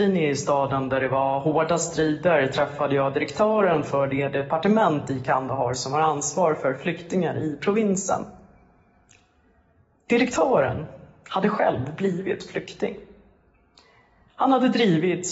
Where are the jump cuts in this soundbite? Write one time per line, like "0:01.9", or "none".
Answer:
none